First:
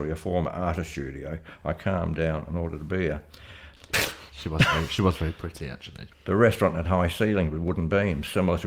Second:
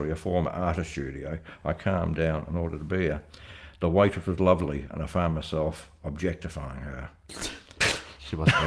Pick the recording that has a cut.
first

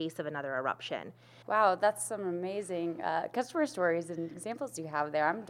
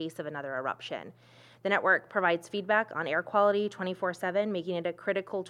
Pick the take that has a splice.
first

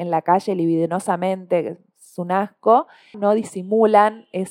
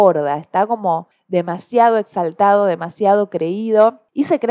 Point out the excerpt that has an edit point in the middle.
first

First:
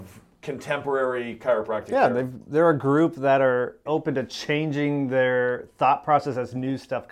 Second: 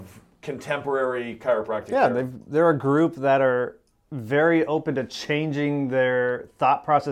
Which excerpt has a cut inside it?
first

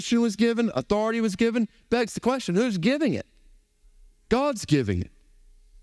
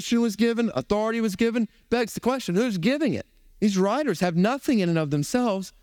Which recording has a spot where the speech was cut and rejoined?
second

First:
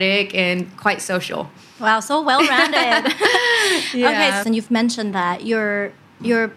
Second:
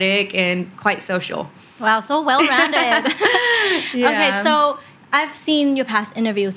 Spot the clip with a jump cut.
first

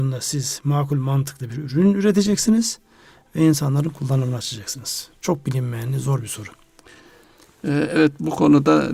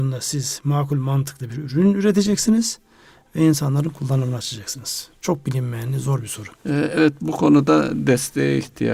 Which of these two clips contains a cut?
second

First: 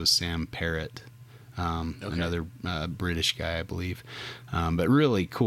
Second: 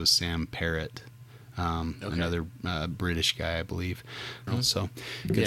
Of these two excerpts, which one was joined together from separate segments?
second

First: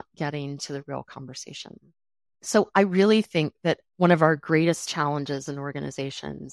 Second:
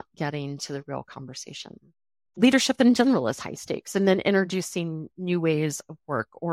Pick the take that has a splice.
second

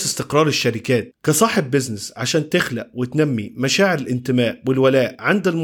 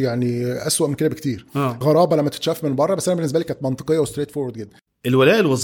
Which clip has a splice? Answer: second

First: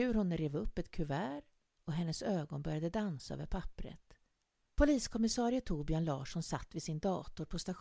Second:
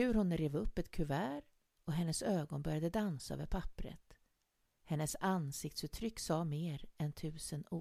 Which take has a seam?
first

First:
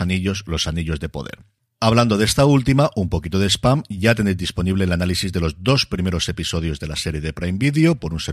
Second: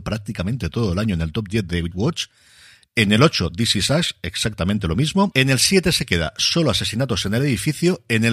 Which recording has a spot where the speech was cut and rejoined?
second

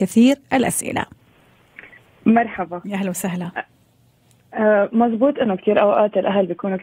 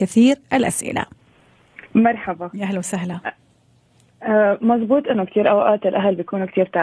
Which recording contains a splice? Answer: second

